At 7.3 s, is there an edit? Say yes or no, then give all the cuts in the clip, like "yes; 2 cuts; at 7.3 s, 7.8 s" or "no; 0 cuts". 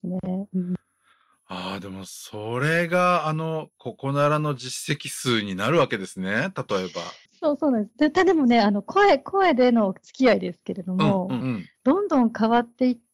yes; 2 cuts; at 7.3 s, 11.4 s